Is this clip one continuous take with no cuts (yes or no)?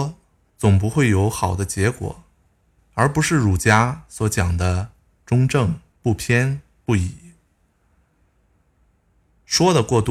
no